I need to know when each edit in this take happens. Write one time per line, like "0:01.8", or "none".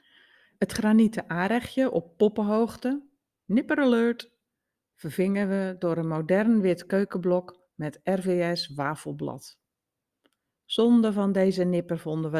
none

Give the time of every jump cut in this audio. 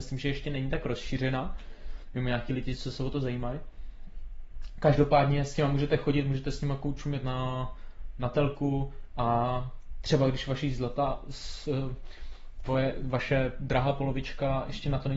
none

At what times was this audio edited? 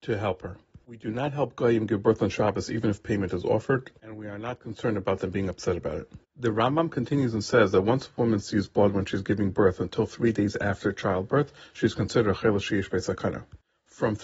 none

